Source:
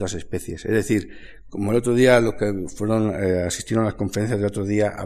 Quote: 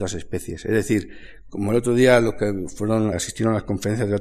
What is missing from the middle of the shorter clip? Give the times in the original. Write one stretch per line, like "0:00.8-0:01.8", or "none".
0:03.1-0:03.4